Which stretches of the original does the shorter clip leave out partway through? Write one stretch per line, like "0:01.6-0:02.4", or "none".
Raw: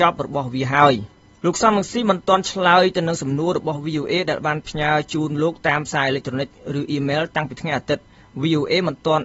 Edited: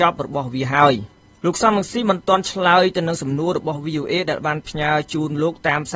none